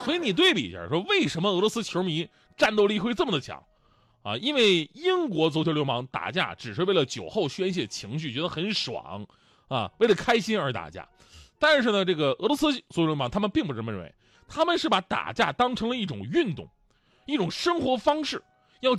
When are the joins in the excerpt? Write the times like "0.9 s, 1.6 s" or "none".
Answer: none

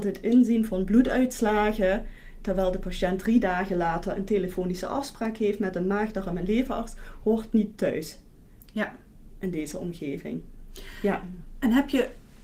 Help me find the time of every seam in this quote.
none

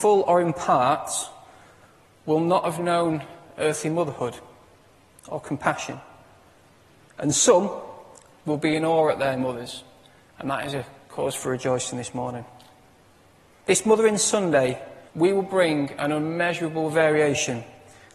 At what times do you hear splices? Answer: 13.6 s, 15.1 s

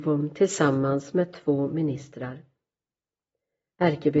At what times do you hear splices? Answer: none

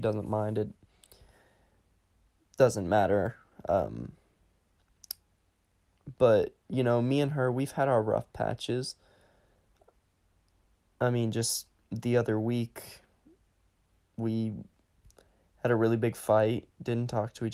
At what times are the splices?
none

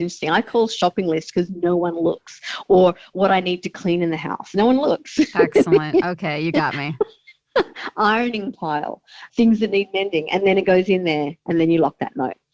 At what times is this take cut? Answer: 9.3 s

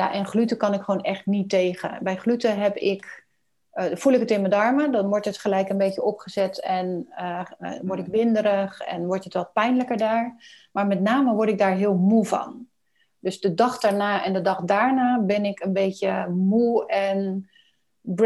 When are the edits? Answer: none

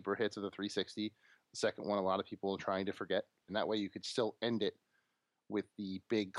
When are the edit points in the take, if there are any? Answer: 3.5 s

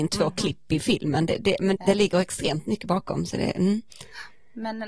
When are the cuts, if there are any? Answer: 1.8 s

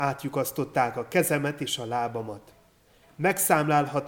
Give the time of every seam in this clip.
none

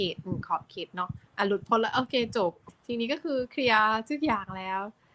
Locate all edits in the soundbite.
1.3 s

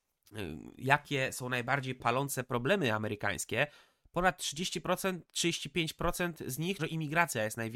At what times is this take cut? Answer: 6.8 s

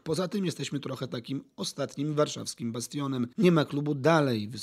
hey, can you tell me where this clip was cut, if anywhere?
3.3 s

